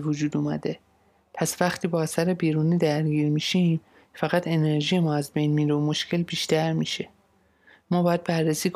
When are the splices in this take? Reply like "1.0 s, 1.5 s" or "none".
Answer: 1.2 s